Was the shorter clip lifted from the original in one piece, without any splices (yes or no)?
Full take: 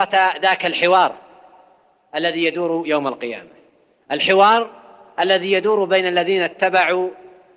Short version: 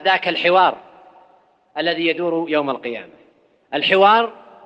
yes